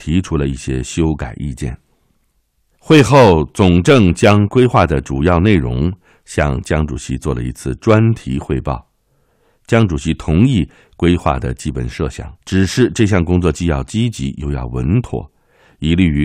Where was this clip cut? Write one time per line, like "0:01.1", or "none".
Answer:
0:12.4